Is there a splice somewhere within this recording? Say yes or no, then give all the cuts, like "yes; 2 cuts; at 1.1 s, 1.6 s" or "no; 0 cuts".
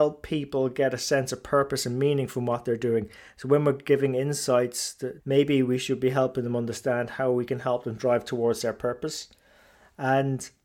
yes; 1 cut; at 5.2 s